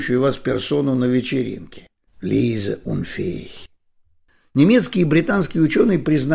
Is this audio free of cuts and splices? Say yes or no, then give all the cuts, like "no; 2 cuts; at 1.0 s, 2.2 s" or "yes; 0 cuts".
no; 1 cut; at 2.1 s